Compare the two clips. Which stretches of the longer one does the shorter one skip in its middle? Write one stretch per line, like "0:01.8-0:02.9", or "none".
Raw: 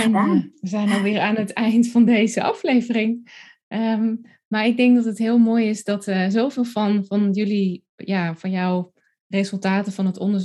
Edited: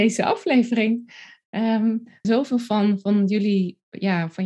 0:04.4-0:06.3